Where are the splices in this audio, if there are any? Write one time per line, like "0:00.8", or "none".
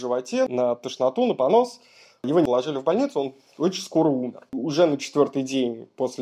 0:04.5